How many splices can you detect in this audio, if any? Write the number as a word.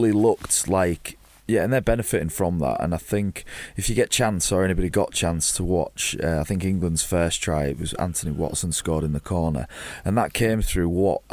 one